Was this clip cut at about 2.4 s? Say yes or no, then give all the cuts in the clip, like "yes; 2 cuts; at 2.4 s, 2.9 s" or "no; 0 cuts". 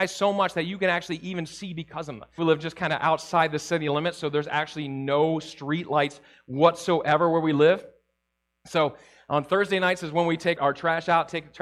yes; 2 cuts; at 2.4 s, 10.6 s